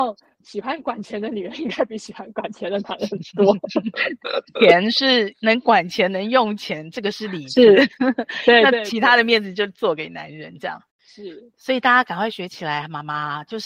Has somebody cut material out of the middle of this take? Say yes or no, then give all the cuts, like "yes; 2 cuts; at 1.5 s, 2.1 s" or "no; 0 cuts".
no; 0 cuts